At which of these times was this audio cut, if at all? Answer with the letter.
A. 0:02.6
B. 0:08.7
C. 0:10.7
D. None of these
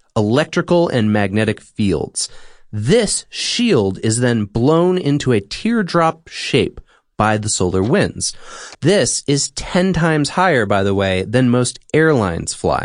B